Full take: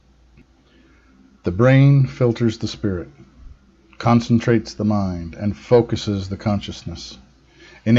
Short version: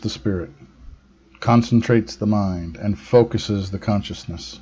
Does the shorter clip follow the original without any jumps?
yes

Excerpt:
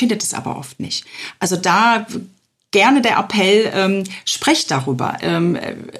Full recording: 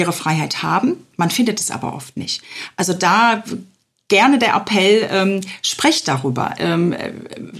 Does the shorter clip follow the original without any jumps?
yes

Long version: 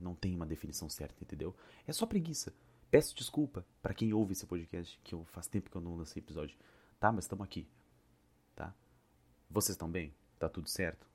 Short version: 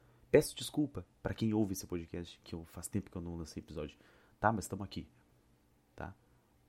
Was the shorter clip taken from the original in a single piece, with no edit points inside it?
yes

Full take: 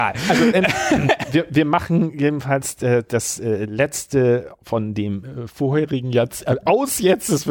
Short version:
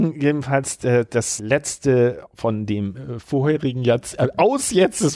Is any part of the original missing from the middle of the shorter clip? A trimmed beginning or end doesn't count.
yes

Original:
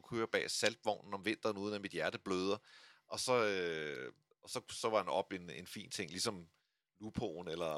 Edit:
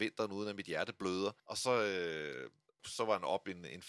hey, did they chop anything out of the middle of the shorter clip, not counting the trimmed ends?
yes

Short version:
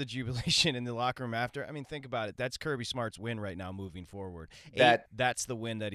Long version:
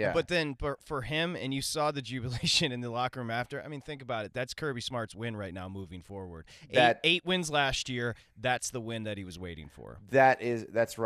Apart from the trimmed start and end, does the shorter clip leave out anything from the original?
yes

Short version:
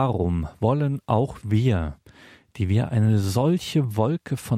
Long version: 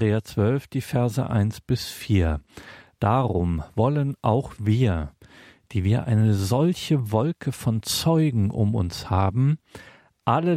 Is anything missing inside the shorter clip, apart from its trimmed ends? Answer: no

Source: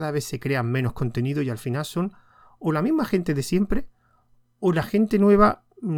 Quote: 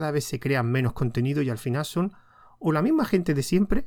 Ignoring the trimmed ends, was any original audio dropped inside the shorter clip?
no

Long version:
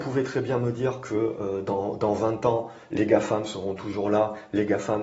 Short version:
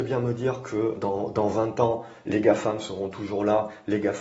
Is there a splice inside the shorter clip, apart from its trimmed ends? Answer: yes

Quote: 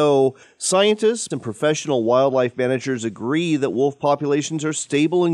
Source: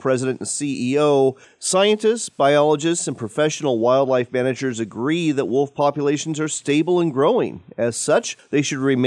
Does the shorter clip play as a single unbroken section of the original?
no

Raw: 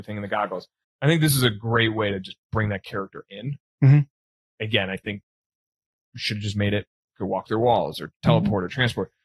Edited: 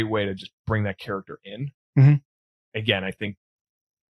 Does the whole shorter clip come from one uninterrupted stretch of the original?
yes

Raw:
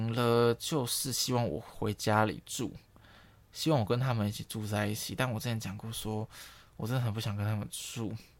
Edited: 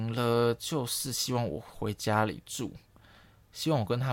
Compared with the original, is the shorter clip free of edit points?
yes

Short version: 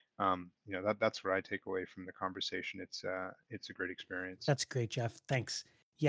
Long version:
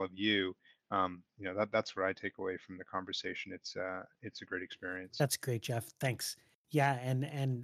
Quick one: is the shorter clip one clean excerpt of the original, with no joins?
yes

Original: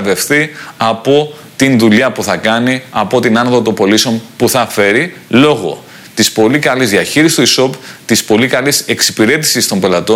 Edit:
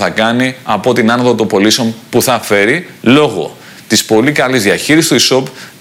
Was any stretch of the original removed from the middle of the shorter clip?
no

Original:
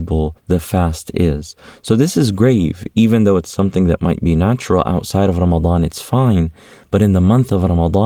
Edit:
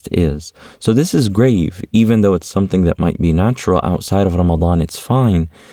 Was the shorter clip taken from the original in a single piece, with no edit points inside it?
yes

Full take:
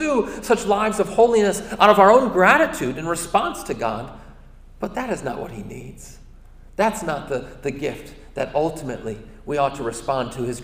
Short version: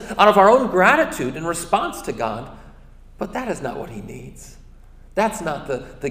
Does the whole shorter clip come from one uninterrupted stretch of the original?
yes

